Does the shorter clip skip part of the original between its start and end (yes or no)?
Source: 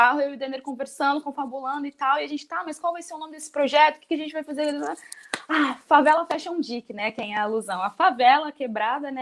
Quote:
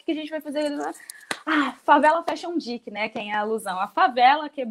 no